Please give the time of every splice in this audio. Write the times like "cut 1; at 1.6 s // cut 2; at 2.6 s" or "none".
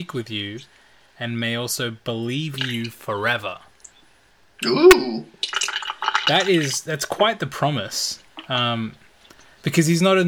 none